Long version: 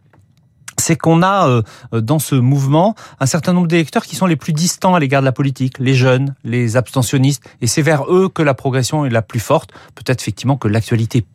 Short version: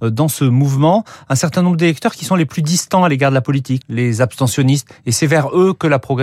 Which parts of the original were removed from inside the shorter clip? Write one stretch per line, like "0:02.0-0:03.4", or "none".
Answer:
0:05.7-0:06.4